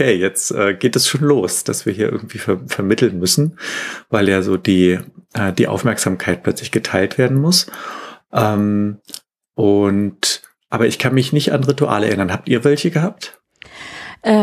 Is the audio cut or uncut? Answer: uncut